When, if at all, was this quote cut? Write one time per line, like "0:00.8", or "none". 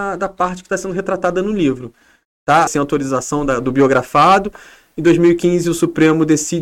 0:02.7